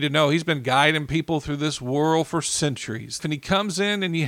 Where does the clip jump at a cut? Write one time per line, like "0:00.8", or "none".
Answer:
0:03.2